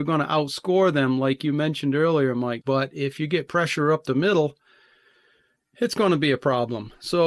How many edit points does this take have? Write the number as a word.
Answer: one